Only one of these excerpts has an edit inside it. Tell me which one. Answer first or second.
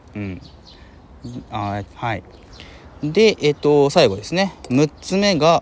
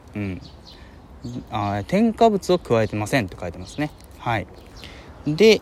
first